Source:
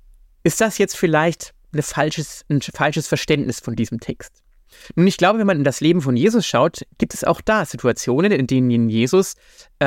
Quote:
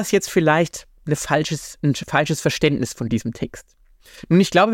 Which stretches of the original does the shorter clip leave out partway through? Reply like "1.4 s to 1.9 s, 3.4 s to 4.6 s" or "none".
none